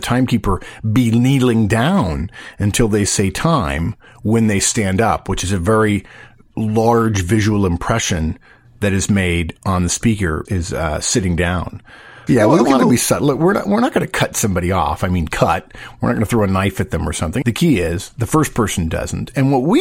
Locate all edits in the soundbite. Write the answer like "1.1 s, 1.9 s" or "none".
10.4 s, 12.3 s, 17.4 s